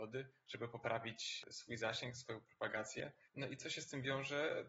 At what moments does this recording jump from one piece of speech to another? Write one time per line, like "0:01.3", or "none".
none